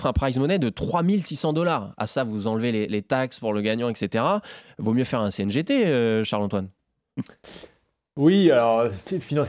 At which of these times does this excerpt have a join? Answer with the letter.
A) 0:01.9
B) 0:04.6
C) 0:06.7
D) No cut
B